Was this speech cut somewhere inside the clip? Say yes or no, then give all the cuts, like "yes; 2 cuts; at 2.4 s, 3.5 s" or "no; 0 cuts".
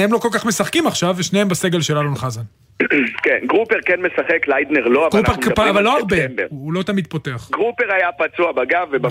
no; 0 cuts